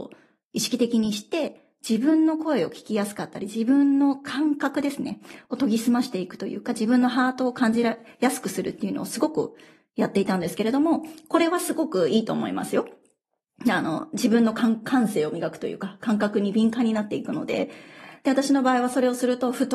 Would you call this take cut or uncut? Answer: uncut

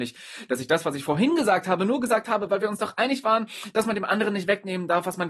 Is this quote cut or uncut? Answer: uncut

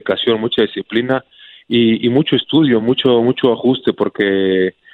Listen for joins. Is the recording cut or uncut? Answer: uncut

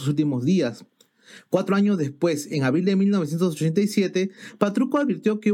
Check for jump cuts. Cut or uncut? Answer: uncut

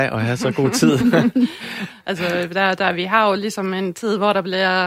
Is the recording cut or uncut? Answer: uncut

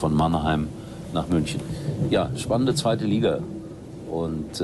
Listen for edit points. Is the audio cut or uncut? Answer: uncut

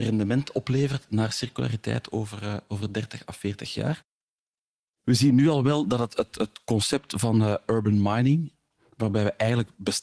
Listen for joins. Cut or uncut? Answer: uncut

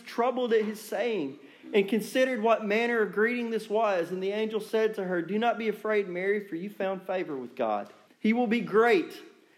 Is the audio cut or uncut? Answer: cut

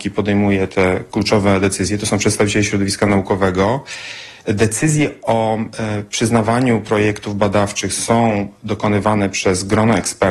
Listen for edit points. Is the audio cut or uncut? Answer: uncut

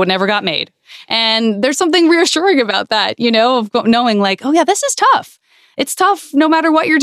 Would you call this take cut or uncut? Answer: uncut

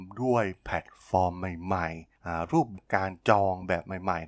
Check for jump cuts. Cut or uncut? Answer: cut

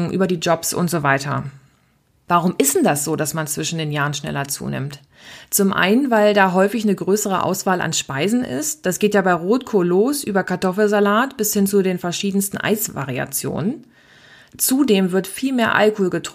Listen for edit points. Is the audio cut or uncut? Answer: cut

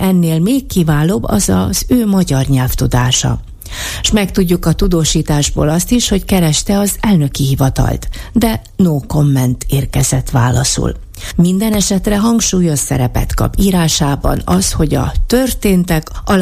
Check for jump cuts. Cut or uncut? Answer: uncut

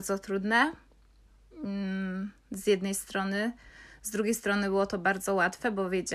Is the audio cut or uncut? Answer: uncut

